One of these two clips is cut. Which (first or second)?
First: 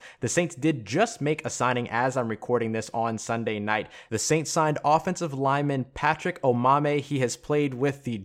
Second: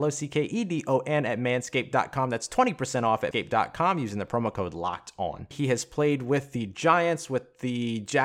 second